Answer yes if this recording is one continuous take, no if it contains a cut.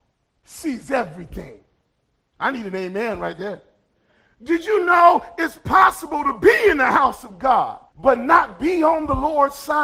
no